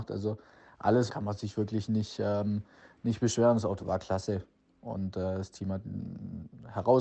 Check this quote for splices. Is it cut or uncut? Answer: cut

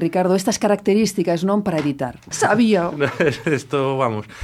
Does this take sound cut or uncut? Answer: cut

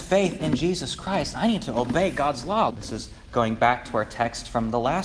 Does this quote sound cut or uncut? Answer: cut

